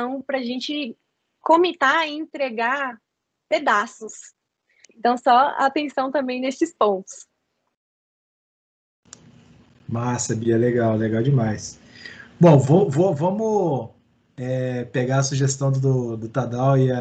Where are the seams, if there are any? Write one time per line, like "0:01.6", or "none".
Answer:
0:04.8